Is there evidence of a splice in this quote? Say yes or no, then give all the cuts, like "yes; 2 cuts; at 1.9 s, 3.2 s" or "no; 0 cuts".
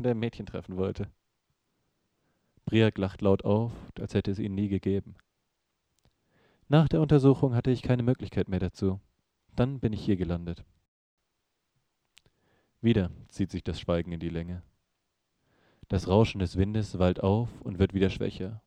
yes; 2 cuts; at 3.9 s, 9.5 s